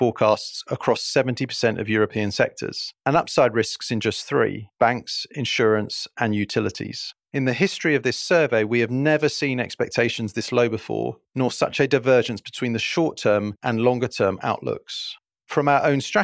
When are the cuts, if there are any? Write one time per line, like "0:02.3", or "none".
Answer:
none